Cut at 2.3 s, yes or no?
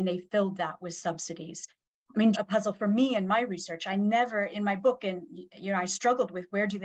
yes